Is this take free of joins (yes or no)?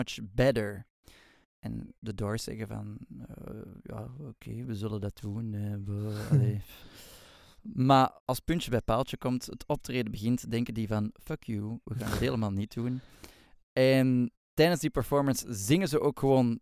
no